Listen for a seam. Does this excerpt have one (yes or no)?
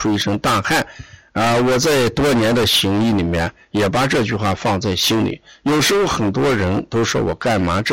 no